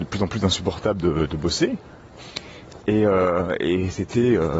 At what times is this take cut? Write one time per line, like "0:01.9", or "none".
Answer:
0:02.8